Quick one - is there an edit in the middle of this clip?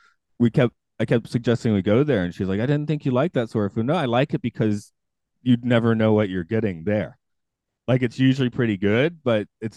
no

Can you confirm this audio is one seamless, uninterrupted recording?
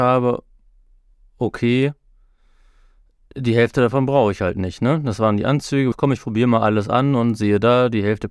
no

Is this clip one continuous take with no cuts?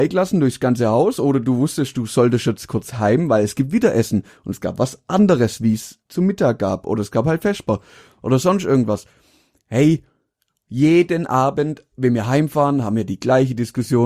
no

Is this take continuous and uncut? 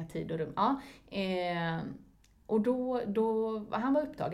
yes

